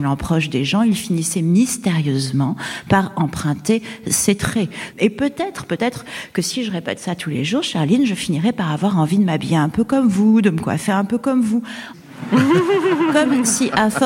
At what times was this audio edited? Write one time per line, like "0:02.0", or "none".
0:04.9
0:11.9